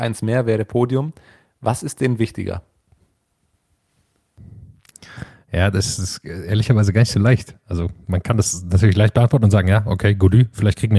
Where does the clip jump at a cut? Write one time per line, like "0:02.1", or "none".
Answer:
none